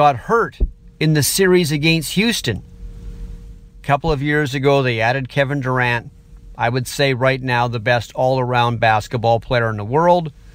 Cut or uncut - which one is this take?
cut